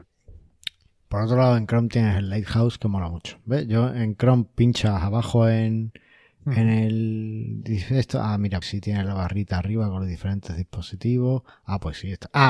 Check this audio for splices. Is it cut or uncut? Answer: cut